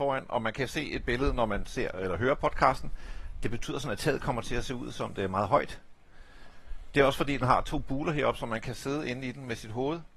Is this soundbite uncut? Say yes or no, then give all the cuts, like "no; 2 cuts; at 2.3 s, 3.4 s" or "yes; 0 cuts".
yes; 0 cuts